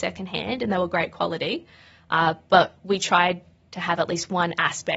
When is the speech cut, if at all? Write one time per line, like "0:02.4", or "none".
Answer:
none